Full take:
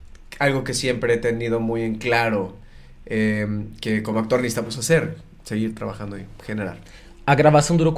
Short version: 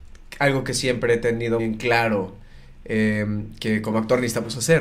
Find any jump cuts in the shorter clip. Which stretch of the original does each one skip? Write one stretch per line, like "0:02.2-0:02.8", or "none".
0:01.6-0:01.8